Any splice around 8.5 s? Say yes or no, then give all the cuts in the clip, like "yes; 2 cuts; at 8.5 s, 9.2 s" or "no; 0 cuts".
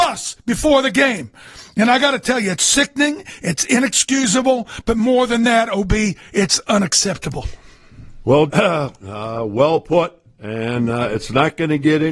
yes; 1 cut; at 8.5 s